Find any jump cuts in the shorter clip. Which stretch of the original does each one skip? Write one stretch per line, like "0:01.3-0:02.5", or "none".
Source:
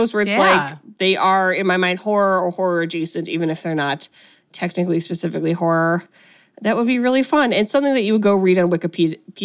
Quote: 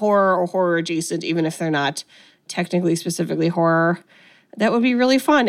none